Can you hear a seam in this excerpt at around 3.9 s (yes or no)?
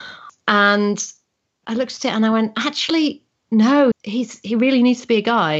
yes